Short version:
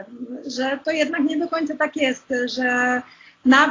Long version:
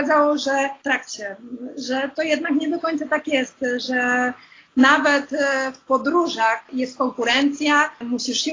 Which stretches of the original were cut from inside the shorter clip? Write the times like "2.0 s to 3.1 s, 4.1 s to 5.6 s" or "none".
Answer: none